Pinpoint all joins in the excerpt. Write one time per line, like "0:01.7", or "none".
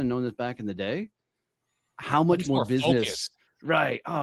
none